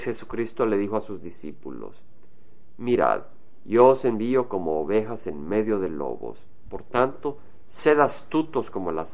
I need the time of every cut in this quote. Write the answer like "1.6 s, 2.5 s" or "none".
none

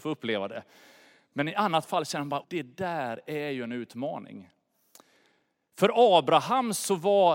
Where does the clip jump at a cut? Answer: 2.4 s

